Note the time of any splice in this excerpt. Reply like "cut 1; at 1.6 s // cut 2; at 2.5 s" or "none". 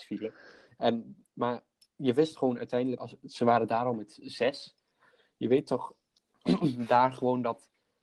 cut 1; at 3.0 s